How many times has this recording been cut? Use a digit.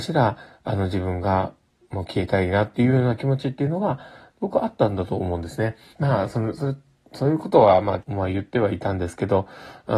2